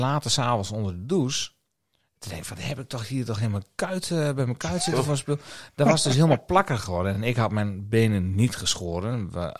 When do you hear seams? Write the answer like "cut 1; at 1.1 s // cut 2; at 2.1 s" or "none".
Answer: none